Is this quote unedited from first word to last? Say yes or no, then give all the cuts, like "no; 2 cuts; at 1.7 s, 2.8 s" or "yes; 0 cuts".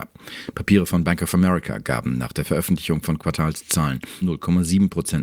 no; 1 cut; at 4.2 s